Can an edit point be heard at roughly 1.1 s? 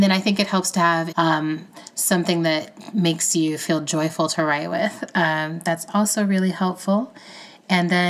yes; 1 cut; at 1.1 s

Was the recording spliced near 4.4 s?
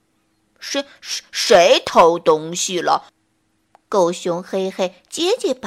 no; 1 cut; at 3.1 s

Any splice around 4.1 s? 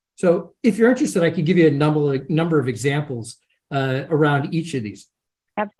yes; 1 cut; at 4.1 s

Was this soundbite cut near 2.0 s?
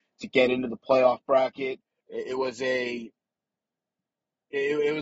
yes; 1 cut; at 2.0 s

